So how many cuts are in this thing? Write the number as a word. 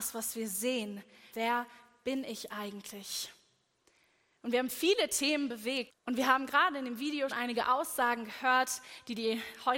three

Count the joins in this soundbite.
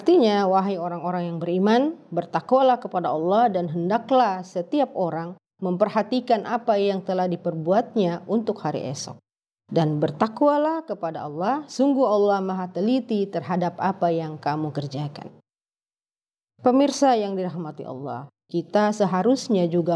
one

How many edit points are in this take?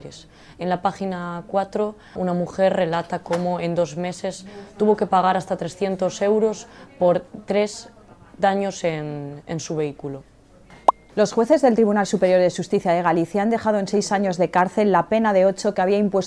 two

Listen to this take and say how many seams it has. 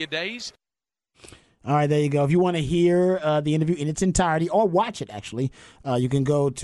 zero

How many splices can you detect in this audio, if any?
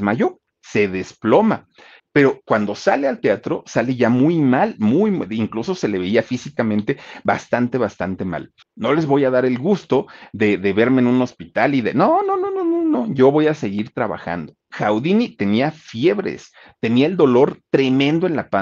three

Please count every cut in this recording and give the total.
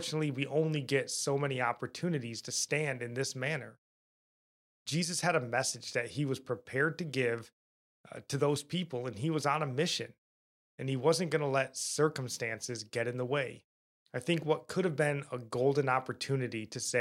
two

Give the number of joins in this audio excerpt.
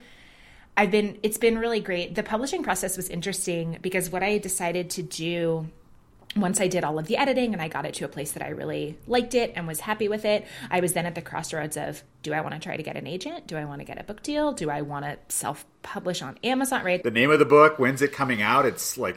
one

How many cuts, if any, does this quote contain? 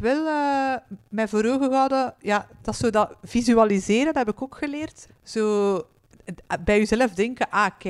one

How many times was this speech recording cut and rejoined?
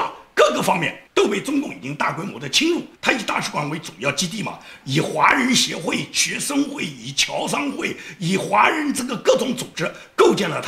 two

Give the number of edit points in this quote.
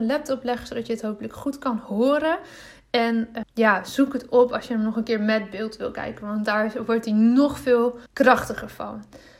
two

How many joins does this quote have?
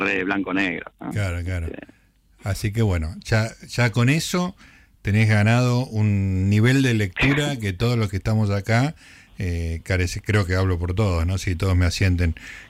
zero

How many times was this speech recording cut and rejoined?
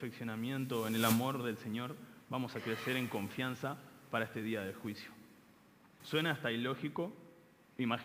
one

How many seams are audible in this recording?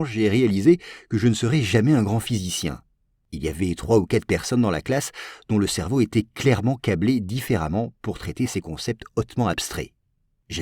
zero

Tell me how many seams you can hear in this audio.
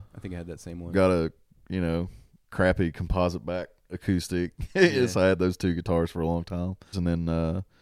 one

